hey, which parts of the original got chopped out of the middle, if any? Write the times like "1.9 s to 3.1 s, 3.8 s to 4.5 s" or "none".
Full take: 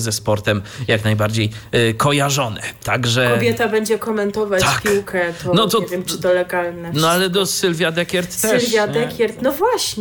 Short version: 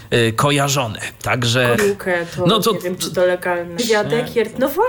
3.4 s to 4.8 s, 6.9 s to 8.6 s